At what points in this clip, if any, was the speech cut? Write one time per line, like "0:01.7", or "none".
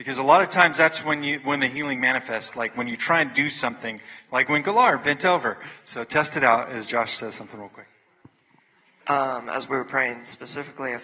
none